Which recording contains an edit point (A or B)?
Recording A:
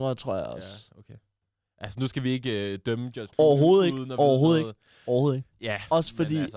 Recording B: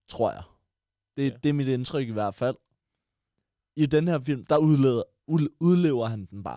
A